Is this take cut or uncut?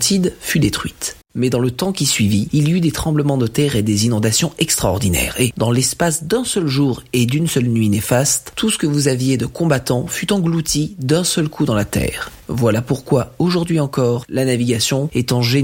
cut